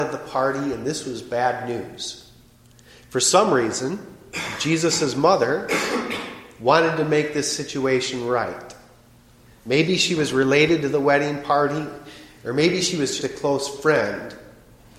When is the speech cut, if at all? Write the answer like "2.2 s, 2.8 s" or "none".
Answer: 13.2 s